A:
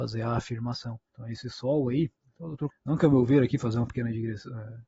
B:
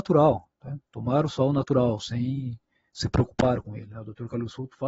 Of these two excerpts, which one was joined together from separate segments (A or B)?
A